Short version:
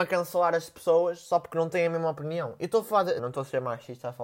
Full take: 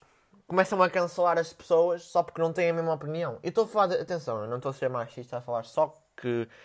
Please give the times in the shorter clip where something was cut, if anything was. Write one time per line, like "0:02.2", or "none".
0:03.2